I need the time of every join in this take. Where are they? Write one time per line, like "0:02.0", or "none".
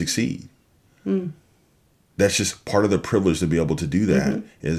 none

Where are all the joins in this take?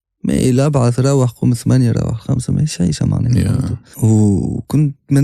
0:03.9

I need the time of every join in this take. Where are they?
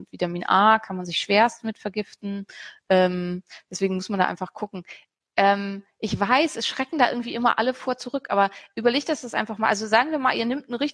none

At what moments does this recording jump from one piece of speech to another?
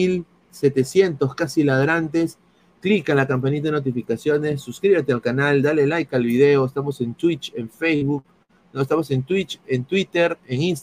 none

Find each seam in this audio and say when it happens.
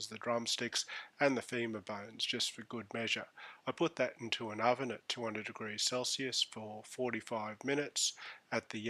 none

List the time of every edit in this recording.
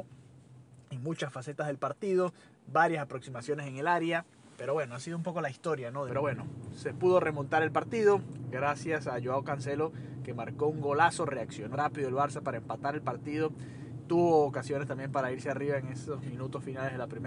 0:06.1
0:11.7

